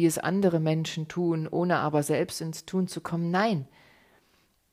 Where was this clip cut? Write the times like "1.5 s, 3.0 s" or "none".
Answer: none